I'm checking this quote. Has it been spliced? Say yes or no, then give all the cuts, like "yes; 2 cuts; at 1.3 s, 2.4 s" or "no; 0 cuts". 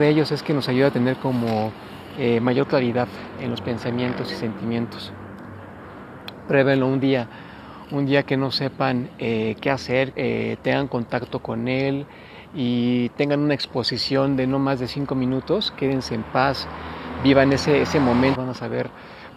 yes; 2 cuts; at 10.1 s, 18.3 s